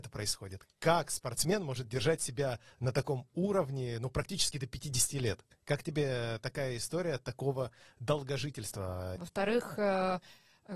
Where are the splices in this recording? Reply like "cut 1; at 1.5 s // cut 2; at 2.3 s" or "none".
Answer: cut 1; at 5.5 s // cut 2; at 9.2 s